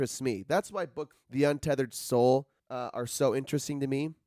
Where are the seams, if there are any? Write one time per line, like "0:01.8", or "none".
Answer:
0:01.1
0:02.6